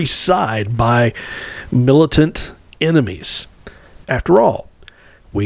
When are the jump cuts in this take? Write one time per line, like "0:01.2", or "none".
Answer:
0:04.0